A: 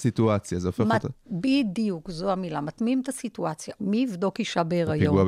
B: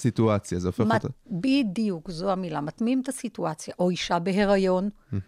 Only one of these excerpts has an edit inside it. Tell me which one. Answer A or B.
A